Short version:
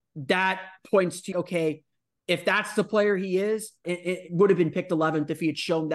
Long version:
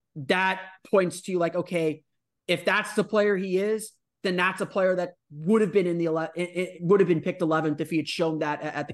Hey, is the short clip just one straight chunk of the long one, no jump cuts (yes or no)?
no